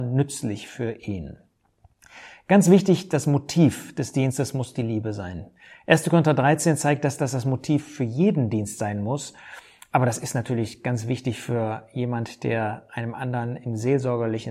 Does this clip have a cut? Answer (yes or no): no